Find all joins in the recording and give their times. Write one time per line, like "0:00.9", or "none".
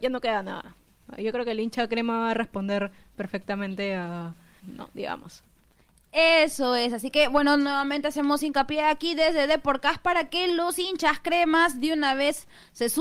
0:04.6